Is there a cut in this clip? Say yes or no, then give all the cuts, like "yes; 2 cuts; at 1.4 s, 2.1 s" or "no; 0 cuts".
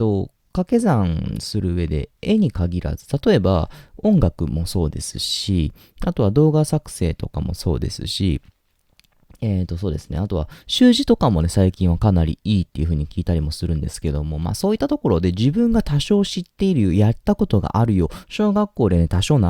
no; 0 cuts